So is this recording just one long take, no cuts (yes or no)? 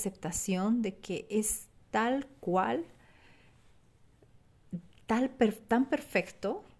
yes